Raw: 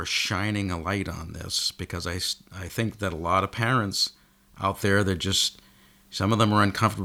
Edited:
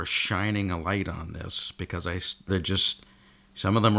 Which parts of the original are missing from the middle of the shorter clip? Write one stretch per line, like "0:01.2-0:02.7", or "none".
0:02.5-0:05.0